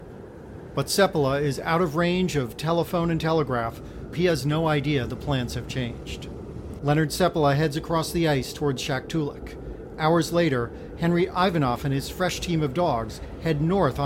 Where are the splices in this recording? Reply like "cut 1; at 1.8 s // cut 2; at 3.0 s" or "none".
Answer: cut 1; at 4.1 s // cut 2; at 6.8 s